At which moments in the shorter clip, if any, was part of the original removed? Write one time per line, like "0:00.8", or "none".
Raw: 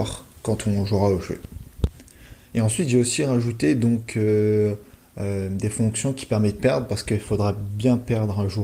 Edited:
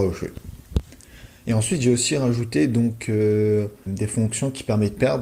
0:03.9